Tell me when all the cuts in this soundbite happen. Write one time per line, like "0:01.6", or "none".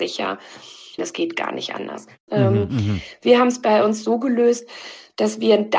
0:01.0
0:02.3